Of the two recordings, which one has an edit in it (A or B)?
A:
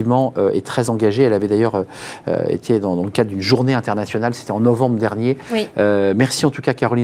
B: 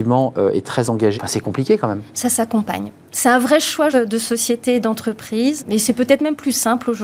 B